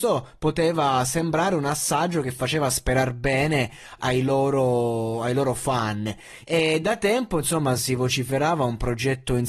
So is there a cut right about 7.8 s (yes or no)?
no